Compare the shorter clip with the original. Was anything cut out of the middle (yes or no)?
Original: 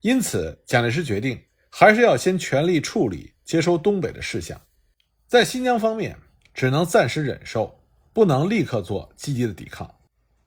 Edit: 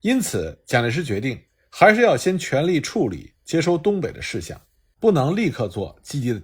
yes